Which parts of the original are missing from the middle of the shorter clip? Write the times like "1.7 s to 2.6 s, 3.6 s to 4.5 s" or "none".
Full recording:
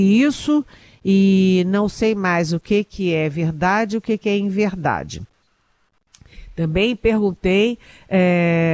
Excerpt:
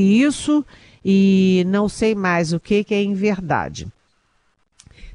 2.8 s to 4.2 s